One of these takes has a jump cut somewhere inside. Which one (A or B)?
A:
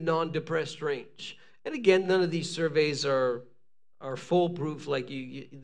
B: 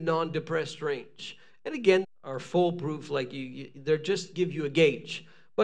B